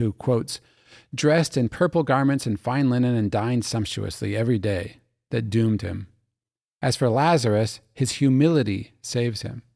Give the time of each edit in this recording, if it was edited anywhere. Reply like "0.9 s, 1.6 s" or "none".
none